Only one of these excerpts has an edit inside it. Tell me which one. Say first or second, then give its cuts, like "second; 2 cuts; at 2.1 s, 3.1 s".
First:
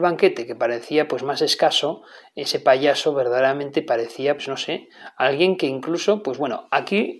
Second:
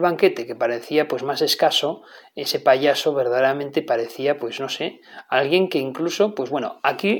first; 1 cut; at 4.4 s